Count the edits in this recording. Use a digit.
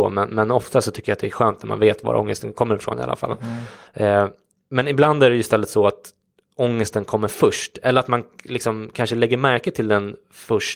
0